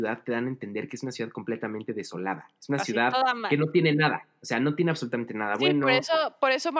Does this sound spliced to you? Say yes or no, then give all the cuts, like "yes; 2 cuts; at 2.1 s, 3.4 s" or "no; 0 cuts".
no; 0 cuts